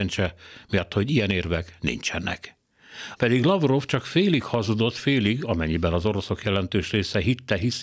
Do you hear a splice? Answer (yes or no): yes